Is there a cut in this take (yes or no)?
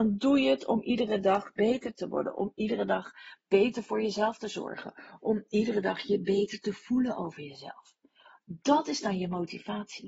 no